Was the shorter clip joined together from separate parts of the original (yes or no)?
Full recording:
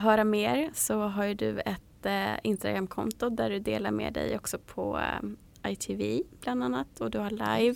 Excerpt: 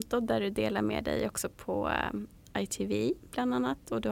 no